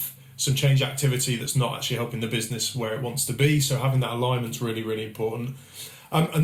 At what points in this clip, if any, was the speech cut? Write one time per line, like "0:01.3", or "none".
none